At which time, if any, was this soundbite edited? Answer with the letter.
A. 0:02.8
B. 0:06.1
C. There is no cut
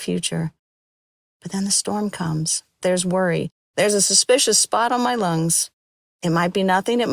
A